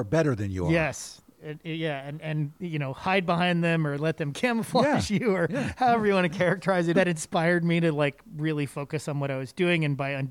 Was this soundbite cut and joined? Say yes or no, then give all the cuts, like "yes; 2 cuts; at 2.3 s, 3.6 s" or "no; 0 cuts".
yes; 1 cut; at 6.9 s